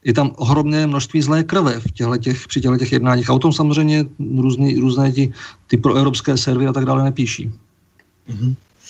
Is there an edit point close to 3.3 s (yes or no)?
no